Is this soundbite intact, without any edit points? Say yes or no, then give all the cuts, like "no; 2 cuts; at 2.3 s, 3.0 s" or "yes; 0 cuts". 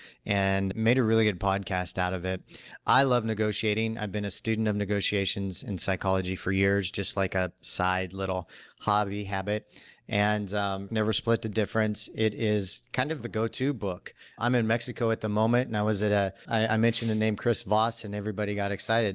no; 3 cuts; at 10.9 s, 13.2 s, 16.4 s